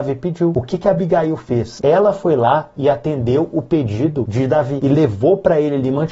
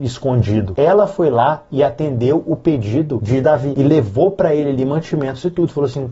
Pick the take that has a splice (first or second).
first